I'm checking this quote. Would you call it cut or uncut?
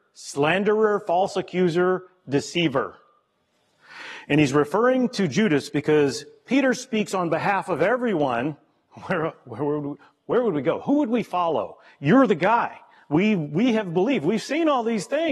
uncut